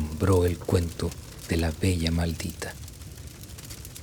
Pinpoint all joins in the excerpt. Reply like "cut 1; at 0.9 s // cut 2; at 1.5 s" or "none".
none

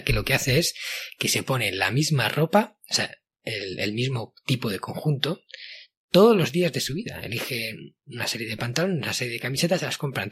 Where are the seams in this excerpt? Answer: none

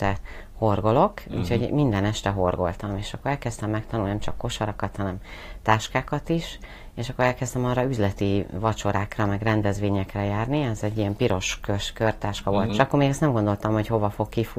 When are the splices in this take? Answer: cut 1; at 12.7 s

